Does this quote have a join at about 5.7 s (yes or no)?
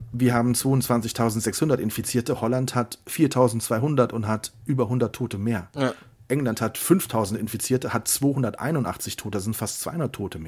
no